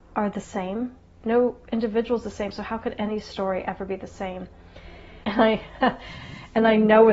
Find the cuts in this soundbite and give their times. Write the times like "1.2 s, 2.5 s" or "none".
5.2 s